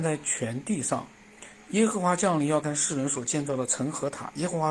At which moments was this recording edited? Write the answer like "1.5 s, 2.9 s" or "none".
2.6 s